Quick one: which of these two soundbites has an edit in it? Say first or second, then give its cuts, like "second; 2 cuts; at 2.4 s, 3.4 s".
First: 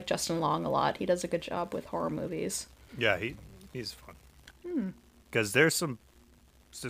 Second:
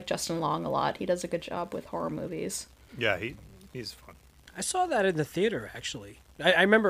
first; 1 cut; at 4.5 s